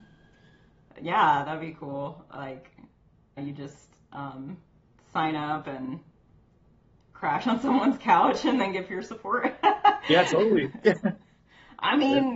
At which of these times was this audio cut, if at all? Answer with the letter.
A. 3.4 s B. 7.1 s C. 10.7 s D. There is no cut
A